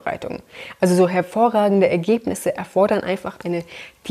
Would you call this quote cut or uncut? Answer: uncut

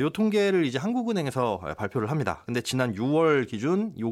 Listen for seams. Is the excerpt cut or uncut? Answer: uncut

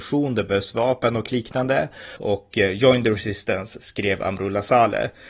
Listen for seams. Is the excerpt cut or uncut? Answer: cut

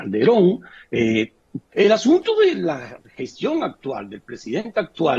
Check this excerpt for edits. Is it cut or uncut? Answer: cut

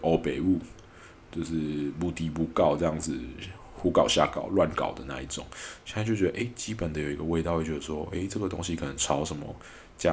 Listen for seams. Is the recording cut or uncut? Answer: uncut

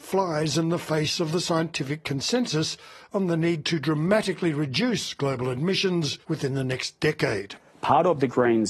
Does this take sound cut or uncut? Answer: cut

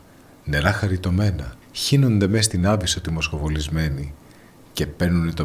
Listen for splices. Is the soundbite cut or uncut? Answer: cut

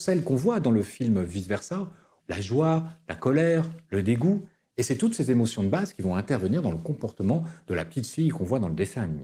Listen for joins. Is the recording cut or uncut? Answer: cut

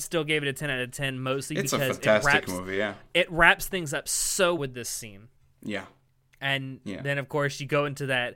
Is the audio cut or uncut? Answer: cut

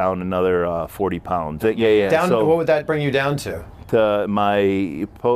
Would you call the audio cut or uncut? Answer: cut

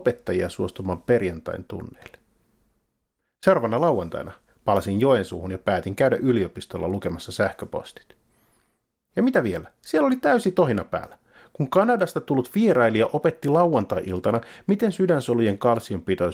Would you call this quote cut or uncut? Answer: cut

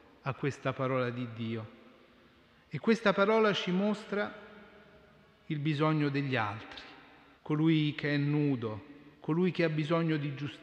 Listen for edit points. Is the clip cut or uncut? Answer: cut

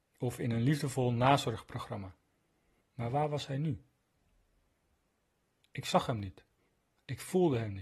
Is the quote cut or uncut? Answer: cut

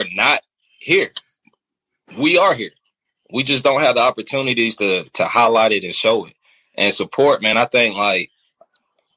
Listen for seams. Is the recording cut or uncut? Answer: uncut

